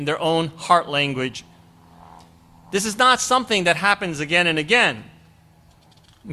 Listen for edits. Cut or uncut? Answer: uncut